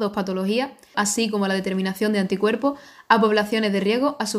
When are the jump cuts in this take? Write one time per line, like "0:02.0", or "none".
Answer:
0:00.9

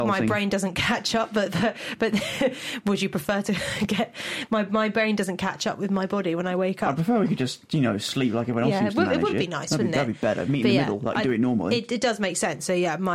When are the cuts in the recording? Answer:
none

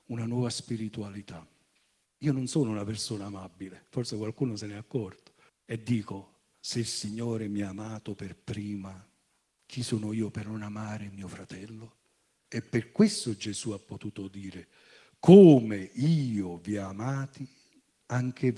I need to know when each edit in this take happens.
0:02.1
0:05.5
0:12.5

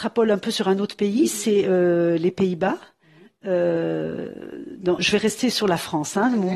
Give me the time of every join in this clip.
0:05.0

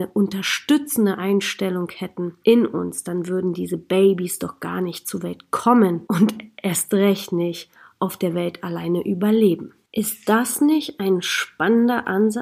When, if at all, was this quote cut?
0:02.4

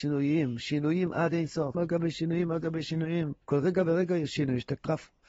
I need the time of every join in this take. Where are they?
0:01.7
0:03.4

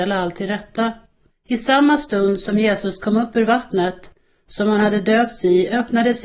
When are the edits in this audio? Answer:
0:01.3

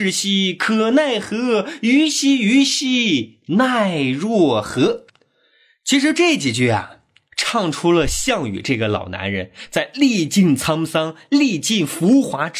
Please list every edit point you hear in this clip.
none

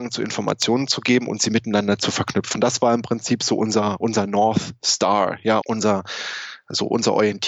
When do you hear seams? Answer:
0:02.5
0:05.6

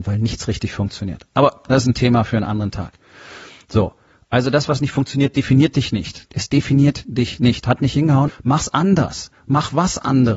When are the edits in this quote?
0:06.3
0:08.3

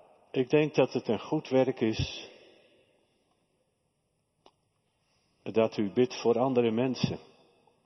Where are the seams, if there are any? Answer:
none

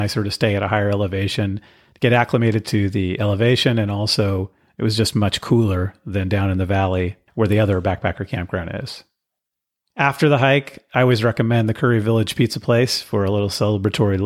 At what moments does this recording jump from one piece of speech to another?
none

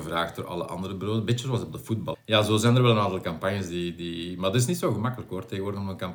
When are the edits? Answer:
0:02.1

